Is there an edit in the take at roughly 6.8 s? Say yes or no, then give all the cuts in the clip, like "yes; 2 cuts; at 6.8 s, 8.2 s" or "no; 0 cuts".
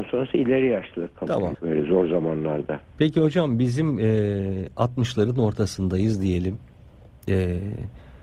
no; 1 cut; at 1.5 s